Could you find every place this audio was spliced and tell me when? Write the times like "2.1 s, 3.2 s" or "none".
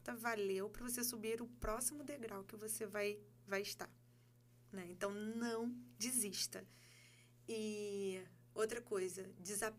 none